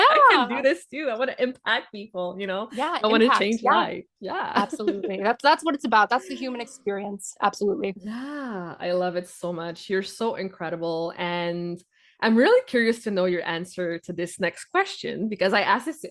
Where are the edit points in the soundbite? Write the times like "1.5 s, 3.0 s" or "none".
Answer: none